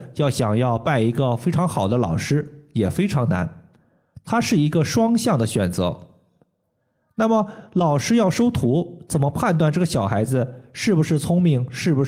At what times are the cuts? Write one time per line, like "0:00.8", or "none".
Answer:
none